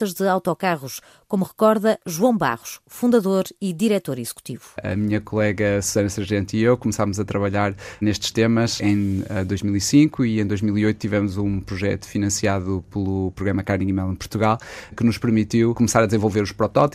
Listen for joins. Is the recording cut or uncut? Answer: cut